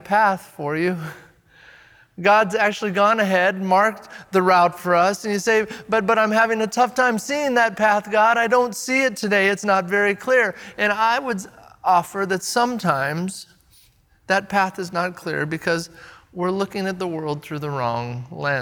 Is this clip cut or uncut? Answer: uncut